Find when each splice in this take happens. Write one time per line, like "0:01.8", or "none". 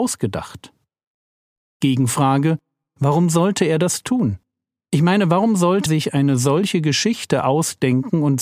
0:05.9